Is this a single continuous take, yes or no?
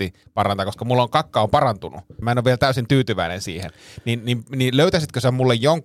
no